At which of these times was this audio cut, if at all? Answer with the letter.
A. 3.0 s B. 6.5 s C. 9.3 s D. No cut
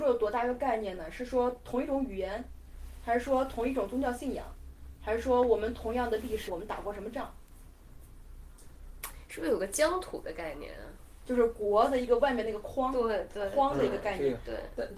B